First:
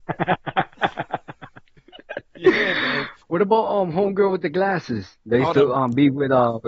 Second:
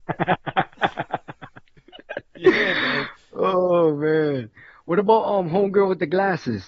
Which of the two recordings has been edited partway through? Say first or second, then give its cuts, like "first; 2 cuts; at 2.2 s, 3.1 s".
first; 1 cut; at 3.2 s